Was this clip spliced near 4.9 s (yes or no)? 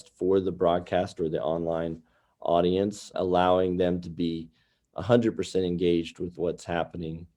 no